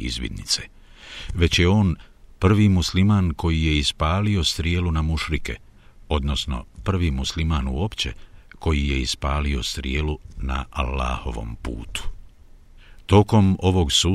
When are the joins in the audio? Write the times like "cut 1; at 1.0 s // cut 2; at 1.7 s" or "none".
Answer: none